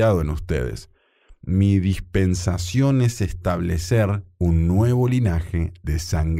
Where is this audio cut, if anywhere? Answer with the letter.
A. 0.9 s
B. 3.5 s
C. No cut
C